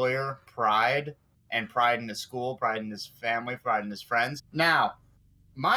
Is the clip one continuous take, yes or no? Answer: no